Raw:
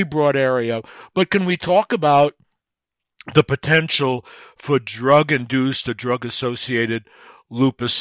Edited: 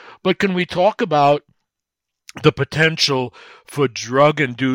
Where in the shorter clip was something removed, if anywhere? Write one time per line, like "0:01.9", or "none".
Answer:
none